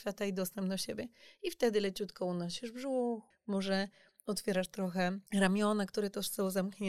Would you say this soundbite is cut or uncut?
cut